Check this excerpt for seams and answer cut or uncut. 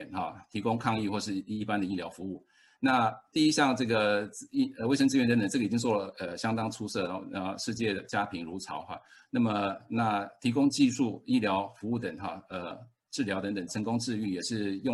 cut